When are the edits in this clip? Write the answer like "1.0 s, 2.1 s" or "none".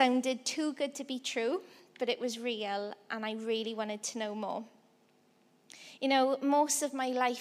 none